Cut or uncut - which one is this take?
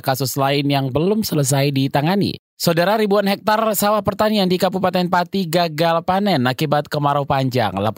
cut